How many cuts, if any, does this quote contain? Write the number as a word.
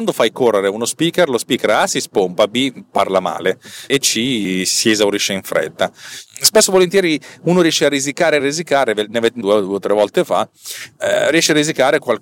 two